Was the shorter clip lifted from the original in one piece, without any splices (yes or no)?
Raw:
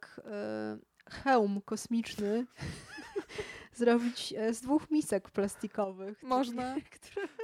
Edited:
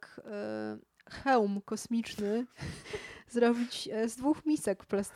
no